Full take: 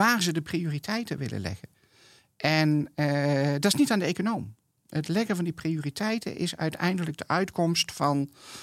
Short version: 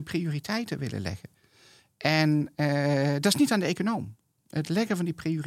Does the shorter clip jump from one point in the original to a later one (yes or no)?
no